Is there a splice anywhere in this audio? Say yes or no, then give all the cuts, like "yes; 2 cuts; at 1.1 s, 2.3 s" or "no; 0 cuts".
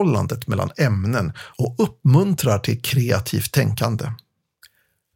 no; 0 cuts